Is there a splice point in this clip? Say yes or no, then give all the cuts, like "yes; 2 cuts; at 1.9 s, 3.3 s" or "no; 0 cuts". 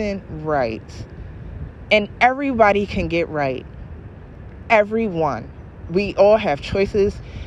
no; 0 cuts